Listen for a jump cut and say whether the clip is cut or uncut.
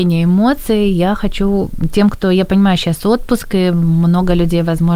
uncut